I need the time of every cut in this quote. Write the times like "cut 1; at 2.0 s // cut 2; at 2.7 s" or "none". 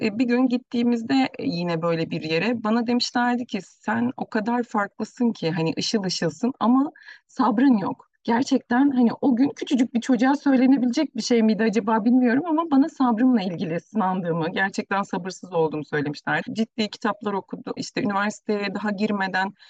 cut 1; at 16.4 s // cut 2; at 17.8 s